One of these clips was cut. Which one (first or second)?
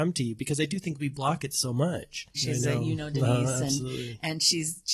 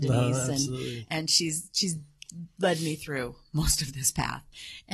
first